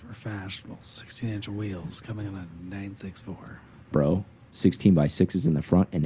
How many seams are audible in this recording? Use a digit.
1